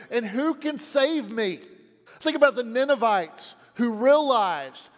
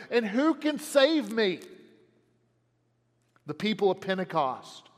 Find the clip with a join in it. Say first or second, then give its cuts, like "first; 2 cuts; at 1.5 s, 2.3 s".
first; 1 cut; at 2.1 s